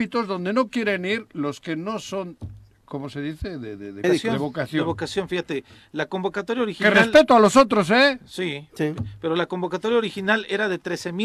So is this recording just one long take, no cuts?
no; 1 cut; at 4.0 s

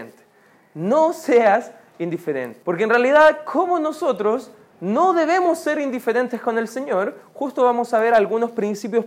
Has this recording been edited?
yes; 1 cut; at 2.6 s

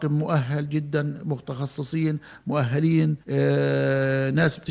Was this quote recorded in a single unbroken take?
no; 1 cut; at 3.2 s

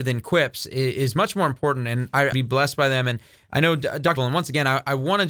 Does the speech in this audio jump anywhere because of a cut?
yes; 2 cuts; at 2.3 s, 4.2 s

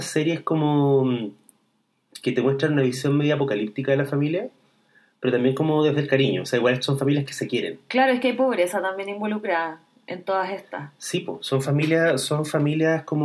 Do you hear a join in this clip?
no; 0 cuts

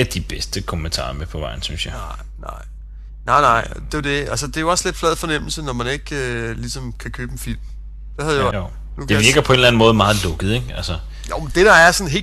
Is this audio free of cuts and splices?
no; 1 cut; at 8.5 s

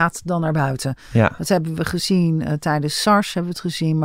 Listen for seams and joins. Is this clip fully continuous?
yes; 0 cuts

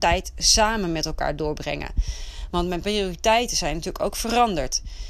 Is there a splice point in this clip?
yes; 1 cut; at 2.5 s

